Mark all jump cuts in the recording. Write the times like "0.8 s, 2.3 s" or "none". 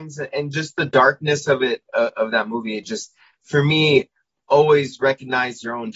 none